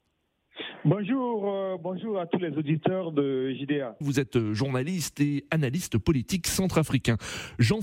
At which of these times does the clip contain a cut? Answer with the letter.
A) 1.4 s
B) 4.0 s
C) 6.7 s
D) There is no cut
B